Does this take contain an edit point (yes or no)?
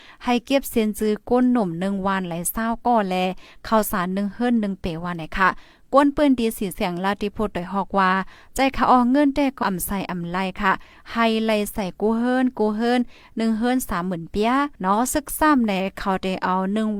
yes